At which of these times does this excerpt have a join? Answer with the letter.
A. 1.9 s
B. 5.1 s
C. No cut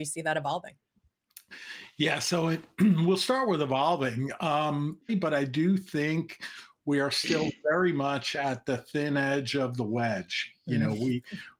B